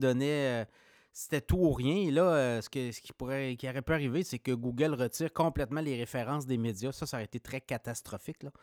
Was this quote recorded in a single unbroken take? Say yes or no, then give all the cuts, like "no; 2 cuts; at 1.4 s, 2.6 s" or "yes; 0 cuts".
yes; 0 cuts